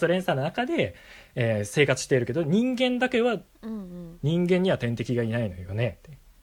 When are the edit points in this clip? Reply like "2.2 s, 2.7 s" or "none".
3.5 s